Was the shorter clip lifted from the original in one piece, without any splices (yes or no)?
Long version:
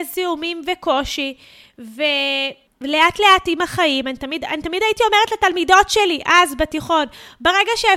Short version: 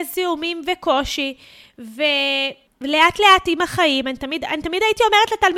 yes